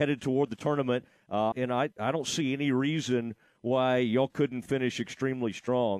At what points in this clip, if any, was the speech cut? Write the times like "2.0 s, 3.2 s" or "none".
1.5 s